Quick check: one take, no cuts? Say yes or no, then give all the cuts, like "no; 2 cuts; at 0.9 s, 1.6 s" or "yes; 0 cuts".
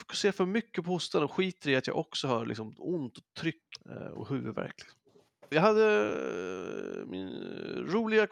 no; 2 cuts; at 3.8 s, 5.5 s